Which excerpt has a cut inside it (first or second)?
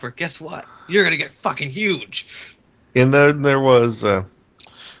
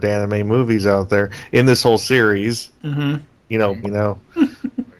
second